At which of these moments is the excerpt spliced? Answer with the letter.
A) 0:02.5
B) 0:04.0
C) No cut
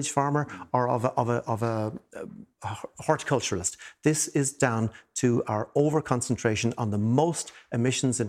A